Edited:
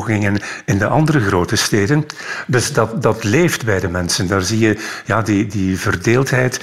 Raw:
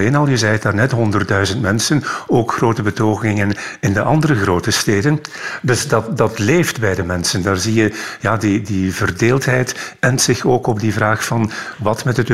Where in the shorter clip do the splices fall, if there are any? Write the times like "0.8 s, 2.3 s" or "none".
none

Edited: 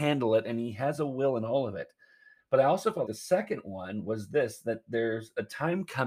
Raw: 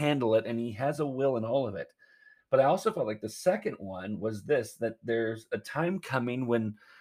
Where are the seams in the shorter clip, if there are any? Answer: 3.1 s

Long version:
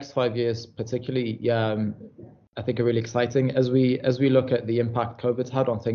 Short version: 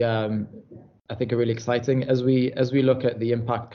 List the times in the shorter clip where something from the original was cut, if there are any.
none

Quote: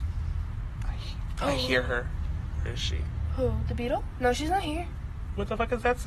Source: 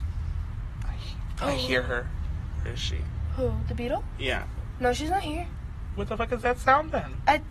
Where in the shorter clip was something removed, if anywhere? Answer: 4.1 s

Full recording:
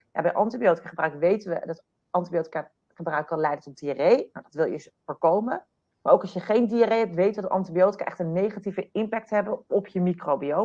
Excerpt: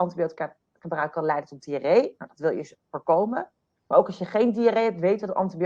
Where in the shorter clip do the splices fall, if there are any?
none

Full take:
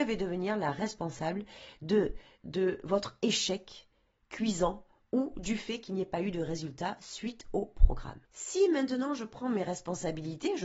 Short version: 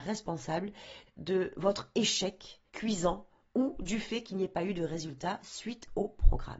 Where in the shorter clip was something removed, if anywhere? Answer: 1.1 s, 2.7 s

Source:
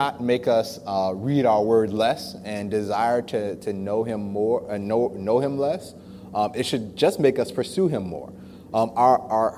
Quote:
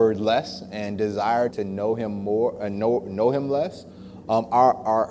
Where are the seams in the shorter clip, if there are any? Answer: 1.5 s, 4.2 s

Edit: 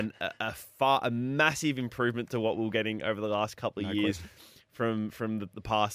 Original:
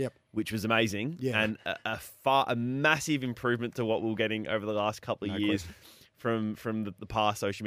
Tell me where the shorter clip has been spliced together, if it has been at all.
none

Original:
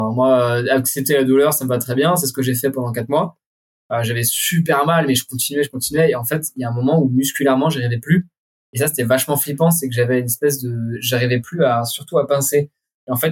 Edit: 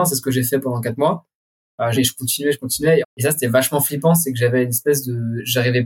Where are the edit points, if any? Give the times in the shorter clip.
1.9 s, 3.0 s

